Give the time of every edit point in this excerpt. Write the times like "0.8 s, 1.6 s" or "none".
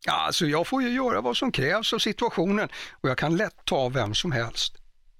none

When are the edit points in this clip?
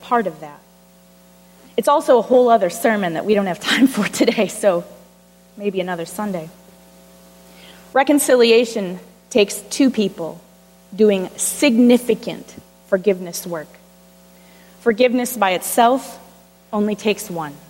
none

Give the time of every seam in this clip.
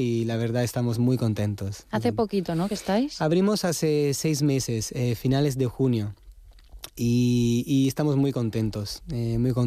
none

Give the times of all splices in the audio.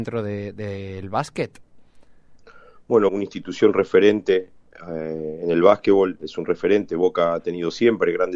3.1 s, 6.2 s

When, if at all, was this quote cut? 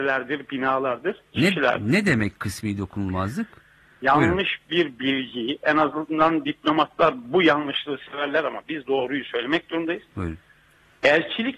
4.0 s

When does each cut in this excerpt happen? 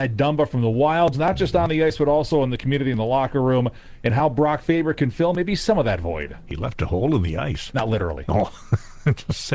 1.1 s

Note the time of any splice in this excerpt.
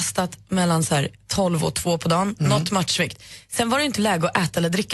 none

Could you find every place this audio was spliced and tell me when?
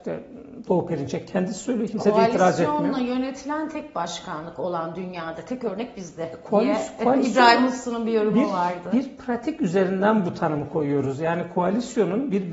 none

